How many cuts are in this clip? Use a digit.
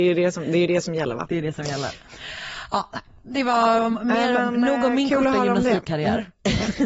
0